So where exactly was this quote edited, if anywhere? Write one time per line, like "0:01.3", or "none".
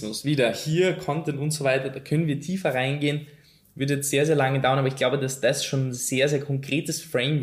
none